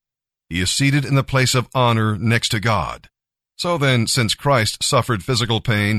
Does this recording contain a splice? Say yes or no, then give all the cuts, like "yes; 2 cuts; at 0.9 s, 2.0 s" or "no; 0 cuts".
yes; 1 cut; at 3.4 s